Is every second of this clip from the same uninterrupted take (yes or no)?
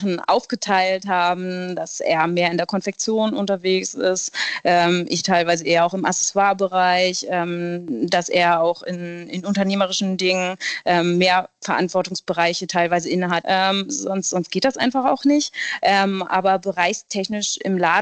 no